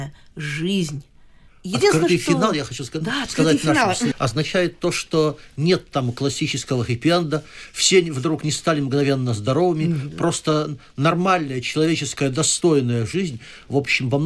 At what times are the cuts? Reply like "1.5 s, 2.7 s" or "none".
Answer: 4.1 s

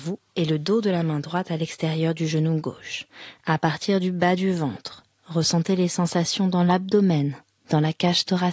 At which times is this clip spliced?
3.4 s

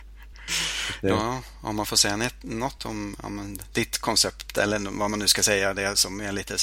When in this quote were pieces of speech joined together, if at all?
none

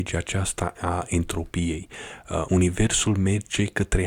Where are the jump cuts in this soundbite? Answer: 2.4 s

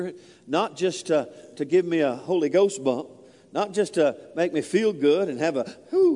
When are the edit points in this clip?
none

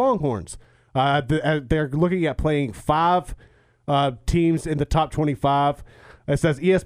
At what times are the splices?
none

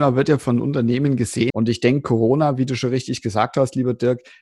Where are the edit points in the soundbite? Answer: 1.5 s

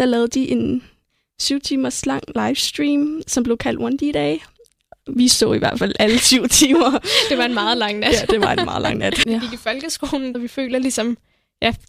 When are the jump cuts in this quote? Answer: 9.2 s, 10.3 s

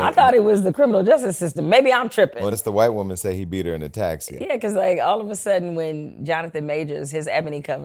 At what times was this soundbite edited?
2.5 s, 4.4 s

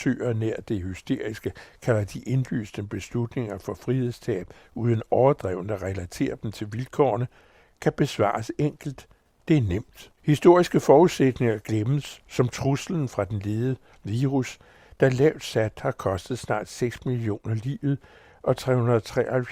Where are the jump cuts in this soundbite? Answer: 10.2 s

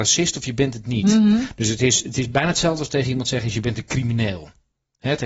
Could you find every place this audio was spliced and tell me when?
none

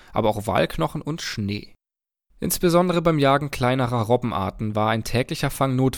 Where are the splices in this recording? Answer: 2.3 s

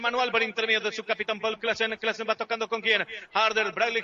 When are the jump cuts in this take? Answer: none

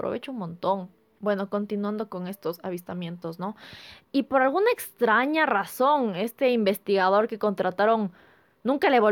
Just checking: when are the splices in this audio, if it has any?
1.2 s, 4.0 s

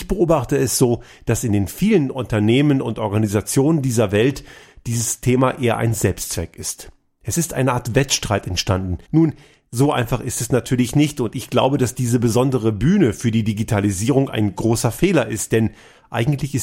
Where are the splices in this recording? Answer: 9.0 s

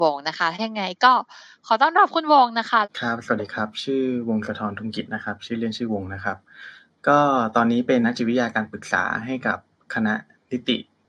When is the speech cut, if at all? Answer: 8.0 s

